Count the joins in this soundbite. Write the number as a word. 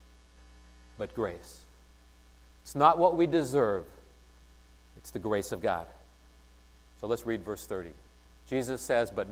one